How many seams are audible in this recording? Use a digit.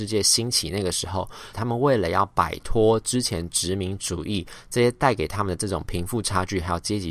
1